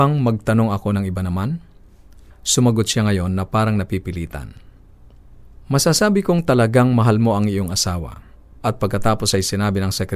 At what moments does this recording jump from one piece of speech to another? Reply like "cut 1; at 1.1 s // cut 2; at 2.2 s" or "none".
cut 1; at 8.5 s